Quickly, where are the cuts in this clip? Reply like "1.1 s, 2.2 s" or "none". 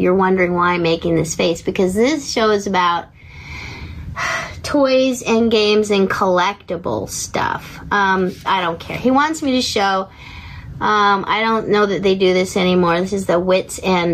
8.4 s